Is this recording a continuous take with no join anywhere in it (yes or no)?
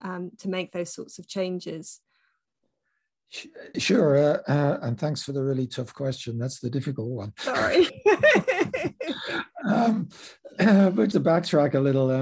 no